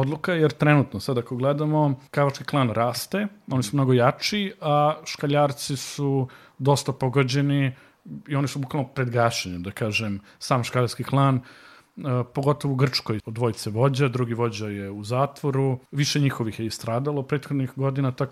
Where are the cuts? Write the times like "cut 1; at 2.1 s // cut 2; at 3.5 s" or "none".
cut 1; at 2.1 s // cut 2; at 13.2 s // cut 3; at 15.9 s